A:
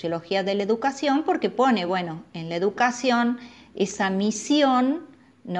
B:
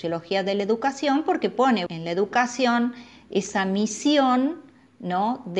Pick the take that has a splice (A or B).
B